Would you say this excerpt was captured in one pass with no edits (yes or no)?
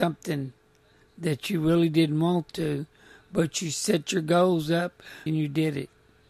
no